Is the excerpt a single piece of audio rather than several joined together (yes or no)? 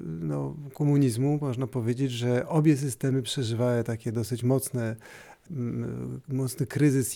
no